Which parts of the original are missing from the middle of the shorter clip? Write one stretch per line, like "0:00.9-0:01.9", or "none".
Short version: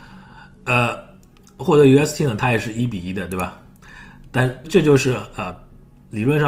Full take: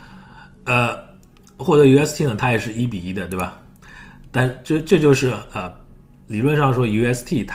0:04.6-0:04.8